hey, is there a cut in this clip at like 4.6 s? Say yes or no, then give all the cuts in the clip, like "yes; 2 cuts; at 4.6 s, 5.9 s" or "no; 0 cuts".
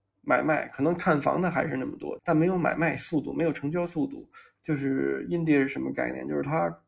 yes; 2 cuts; at 2.2 s, 4.6 s